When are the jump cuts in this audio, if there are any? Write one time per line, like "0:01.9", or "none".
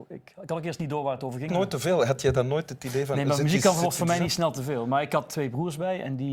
0:01.5